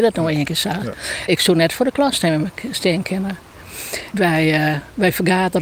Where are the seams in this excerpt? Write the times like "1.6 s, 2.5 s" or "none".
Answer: 1.3 s, 4.1 s

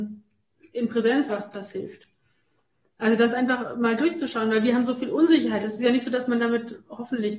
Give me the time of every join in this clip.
1.3 s

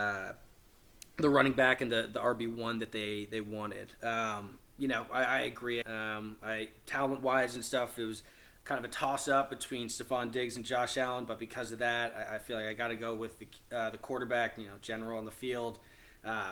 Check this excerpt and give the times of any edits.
5.8 s

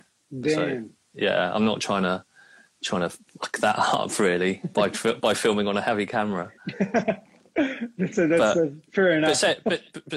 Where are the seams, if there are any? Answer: none

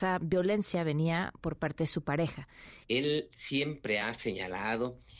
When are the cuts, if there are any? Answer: 2.8 s, 4.0 s

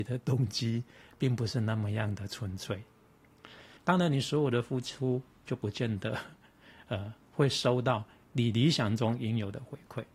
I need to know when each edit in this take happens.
3.8 s

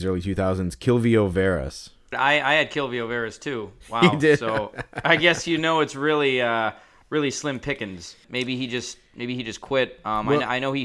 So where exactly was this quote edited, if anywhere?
2.1 s, 8.2 s

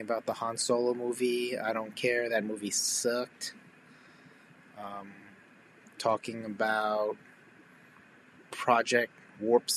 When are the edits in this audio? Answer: none

